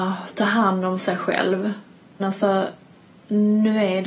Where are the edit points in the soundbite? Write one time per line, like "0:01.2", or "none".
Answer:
0:02.2